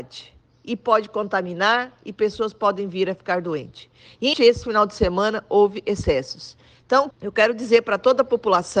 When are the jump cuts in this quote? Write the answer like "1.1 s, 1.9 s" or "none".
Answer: 4.3 s, 7.1 s

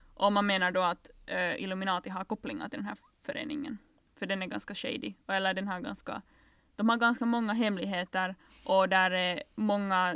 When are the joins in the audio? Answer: none

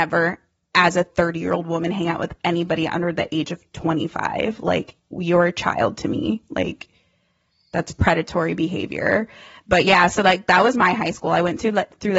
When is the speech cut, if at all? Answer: none

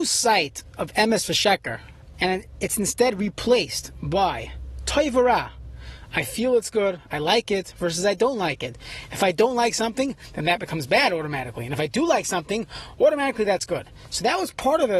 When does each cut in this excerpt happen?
2.1 s

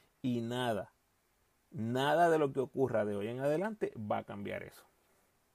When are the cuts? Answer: none

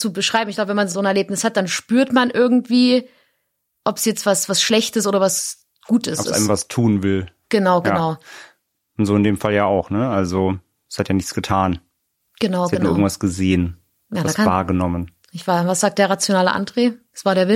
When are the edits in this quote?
0.9 s

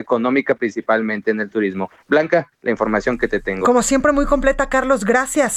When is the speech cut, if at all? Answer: none

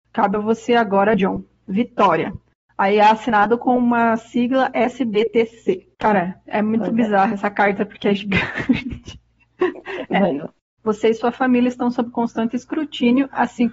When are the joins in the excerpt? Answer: 5.9 s, 10.8 s

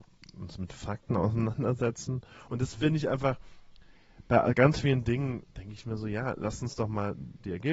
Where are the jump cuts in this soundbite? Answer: 2.5 s, 5.5 s

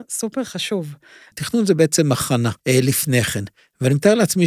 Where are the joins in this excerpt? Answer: 1.3 s, 2.6 s

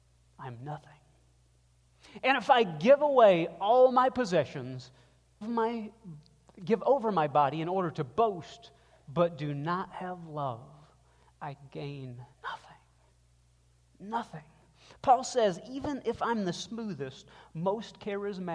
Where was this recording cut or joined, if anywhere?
5.4 s, 12.3 s

